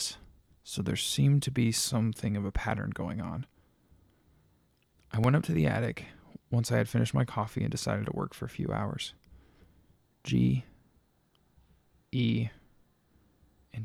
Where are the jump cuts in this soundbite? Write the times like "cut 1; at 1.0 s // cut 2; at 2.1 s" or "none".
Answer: none